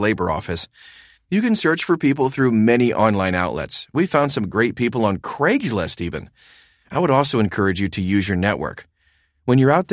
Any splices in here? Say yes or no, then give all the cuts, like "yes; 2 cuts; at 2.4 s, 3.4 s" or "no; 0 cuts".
yes; 1 cut; at 1.2 s